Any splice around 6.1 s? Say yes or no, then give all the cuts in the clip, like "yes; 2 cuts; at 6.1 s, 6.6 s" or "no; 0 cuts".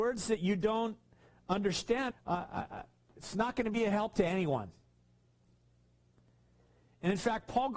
no; 1 cut; at 2.1 s